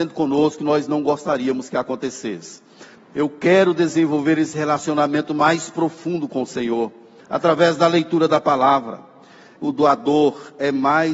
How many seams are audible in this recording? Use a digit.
3